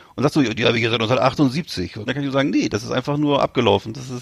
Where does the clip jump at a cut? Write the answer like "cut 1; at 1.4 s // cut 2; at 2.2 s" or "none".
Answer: cut 1; at 2.1 s